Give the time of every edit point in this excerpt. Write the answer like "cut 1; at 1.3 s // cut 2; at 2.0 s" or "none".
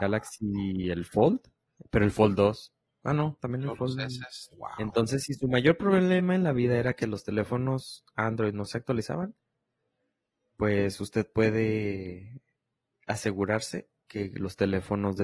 cut 1; at 4.5 s